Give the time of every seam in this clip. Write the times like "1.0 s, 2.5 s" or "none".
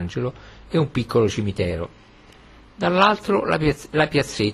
none